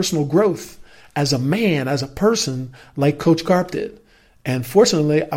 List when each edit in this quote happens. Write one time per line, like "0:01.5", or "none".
none